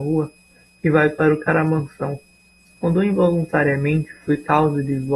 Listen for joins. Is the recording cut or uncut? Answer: cut